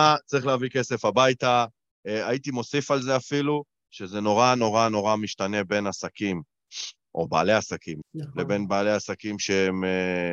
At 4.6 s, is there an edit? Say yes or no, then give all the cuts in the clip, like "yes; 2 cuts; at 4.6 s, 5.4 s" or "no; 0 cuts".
no; 1 cut; at 8.0 s